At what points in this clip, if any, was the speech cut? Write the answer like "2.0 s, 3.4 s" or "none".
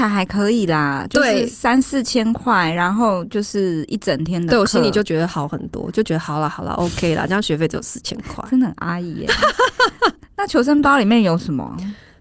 none